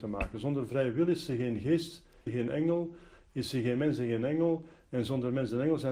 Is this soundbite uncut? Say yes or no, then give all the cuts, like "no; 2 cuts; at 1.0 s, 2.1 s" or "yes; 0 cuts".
no; 1 cut; at 2.3 s